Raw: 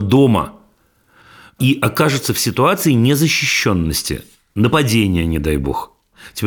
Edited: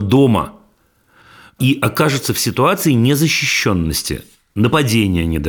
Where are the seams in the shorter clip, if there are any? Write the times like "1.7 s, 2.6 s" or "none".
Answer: none